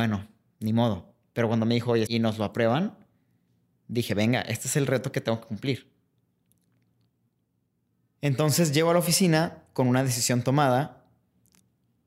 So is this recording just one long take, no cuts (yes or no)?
no